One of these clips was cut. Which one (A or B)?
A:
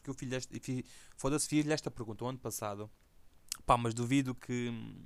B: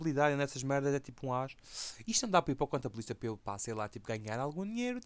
B